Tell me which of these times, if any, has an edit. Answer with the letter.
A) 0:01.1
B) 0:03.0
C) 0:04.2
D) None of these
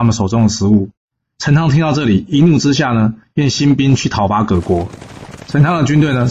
D